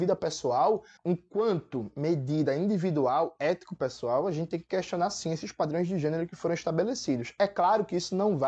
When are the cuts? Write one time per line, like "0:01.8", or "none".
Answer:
0:00.9